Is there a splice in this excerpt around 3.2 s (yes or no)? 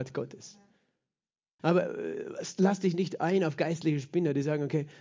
no